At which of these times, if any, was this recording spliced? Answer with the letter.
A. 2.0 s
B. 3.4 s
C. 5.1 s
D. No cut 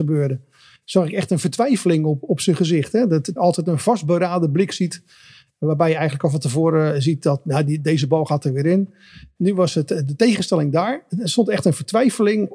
B